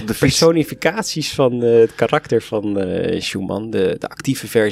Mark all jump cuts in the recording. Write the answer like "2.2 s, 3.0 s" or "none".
none